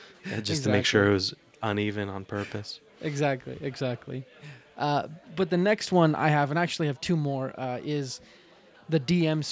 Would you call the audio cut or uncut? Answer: uncut